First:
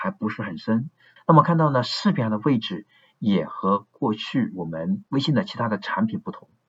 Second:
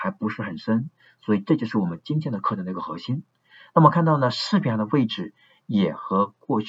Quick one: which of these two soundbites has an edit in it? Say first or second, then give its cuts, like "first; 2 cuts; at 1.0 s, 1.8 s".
first; 2 cuts; at 1.2 s, 5.1 s